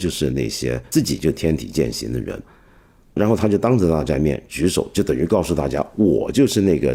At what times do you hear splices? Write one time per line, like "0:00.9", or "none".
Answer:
none